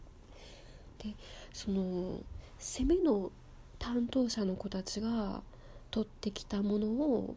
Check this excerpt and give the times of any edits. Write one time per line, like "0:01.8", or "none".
0:01.0